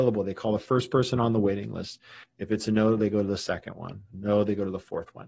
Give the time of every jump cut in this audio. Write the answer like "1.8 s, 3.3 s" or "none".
2.2 s, 4.1 s